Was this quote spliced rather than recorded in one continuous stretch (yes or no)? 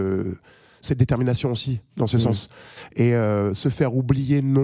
no